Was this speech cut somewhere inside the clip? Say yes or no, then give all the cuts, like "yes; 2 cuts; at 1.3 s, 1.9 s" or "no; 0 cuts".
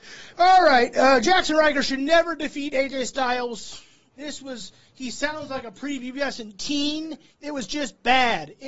yes; 2 cuts; at 4.1 s, 7.3 s